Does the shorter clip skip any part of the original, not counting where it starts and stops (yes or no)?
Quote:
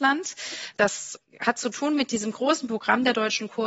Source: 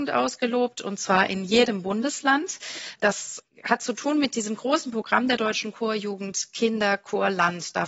no